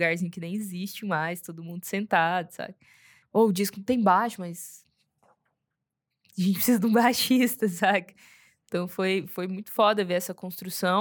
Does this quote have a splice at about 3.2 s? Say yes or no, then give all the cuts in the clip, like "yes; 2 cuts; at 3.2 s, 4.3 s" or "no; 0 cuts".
yes; 1 cut; at 3.2 s